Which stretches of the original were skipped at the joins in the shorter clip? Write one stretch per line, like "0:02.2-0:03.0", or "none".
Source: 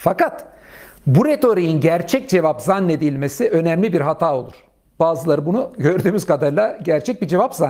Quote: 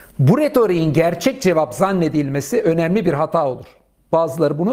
none